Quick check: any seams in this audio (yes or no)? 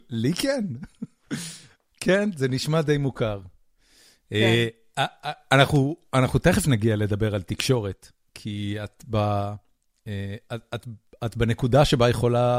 no